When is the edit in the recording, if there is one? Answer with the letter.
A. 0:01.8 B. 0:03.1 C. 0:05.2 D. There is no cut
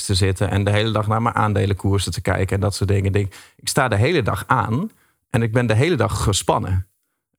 D